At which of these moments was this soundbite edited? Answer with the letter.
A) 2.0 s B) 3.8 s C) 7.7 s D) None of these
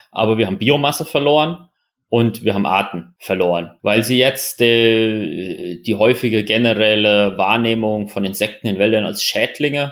D